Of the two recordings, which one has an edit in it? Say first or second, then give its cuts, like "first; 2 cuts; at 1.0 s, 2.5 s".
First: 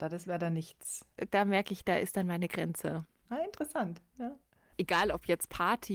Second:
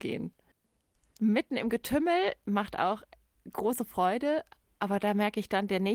first; 1 cut; at 3.2 s